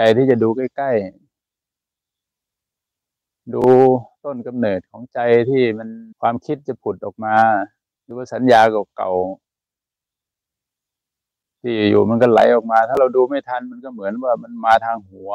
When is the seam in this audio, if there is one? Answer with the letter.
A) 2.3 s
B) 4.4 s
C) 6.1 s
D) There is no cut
C